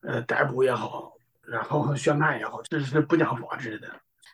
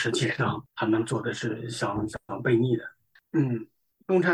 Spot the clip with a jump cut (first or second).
second